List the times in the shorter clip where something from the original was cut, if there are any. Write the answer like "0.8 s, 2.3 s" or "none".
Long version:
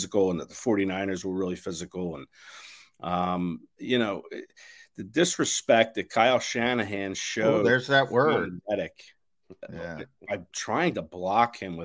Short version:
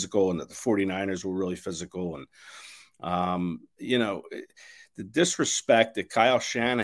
none